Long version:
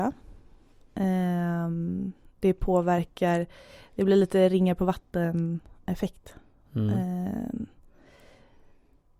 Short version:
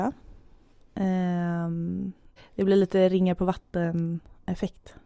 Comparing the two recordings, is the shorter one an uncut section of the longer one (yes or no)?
no